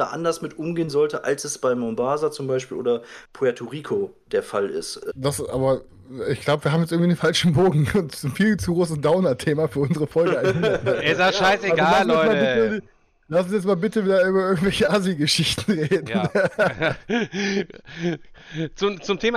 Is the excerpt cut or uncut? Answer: cut